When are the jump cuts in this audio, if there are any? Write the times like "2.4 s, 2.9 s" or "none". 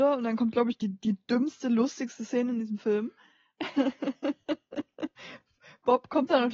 none